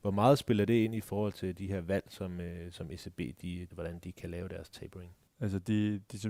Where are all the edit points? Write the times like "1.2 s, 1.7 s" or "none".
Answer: 3.7 s, 5.3 s